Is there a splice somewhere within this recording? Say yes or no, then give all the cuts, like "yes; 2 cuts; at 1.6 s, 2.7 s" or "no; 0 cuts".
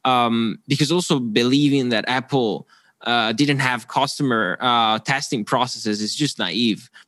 no; 0 cuts